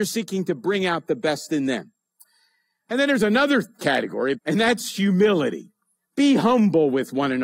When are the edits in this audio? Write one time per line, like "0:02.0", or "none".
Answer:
0:04.3